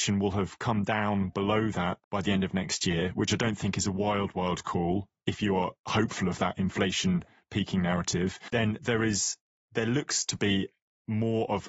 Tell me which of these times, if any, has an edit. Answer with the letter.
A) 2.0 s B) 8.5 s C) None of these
A